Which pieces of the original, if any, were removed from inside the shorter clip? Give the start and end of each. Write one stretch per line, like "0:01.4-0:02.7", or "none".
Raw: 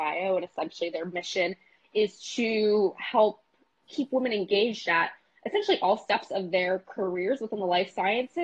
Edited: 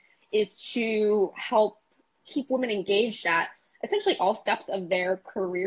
none